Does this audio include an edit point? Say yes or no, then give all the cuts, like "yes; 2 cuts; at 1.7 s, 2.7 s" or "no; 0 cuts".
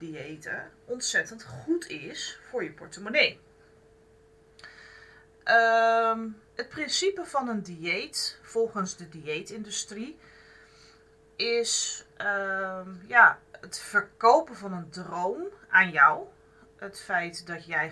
yes; 1 cut; at 6.5 s